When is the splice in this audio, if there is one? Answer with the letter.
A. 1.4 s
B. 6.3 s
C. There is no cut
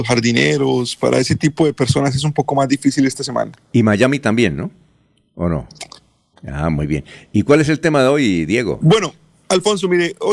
B